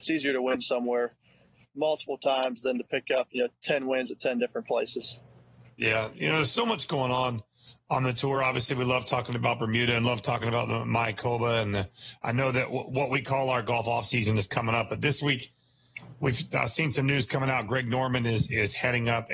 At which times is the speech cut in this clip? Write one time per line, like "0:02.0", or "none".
none